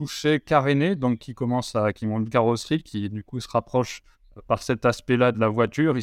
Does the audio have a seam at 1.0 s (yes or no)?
no